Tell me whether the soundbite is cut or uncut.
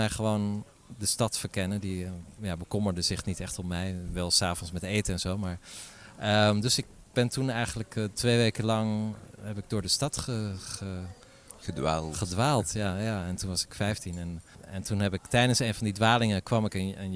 uncut